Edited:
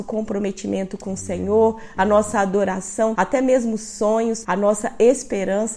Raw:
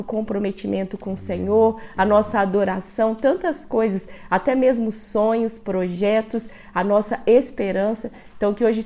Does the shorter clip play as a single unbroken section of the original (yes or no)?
no